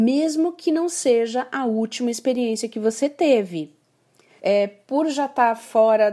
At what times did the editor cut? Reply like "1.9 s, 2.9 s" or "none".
4.4 s

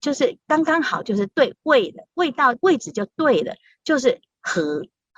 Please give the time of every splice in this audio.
2.6 s

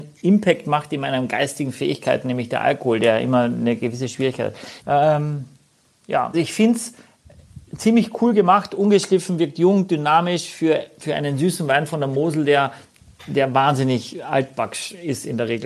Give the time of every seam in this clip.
4.8 s, 6.3 s

